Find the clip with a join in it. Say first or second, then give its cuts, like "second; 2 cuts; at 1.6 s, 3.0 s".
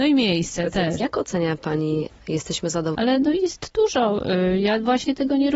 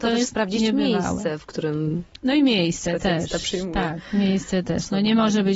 first; 2 cuts; at 1.0 s, 2.9 s